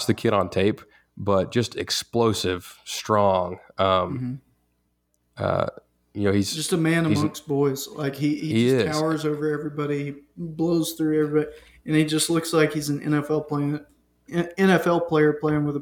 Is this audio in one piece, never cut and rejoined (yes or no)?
yes